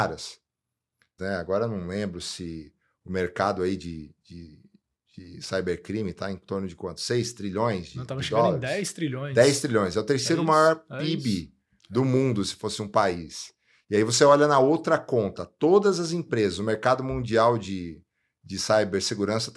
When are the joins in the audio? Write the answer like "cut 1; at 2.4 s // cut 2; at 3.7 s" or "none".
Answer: cut 1; at 1.2 s